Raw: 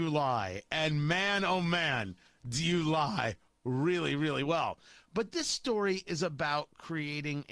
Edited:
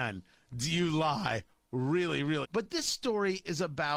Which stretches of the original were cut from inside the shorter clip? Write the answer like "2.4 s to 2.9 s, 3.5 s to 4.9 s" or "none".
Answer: 4.3 s to 5.0 s